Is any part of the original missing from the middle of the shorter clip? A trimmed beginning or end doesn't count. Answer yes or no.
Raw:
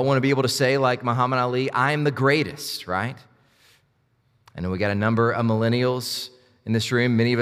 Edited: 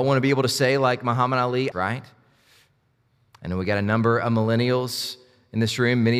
yes